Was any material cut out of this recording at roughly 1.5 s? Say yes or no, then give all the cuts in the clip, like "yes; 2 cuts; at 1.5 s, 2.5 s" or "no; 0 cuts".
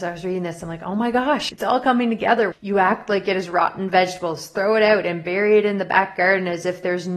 yes; 2 cuts; at 1.5 s, 2.5 s